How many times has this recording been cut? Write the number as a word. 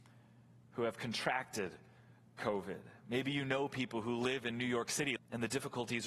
one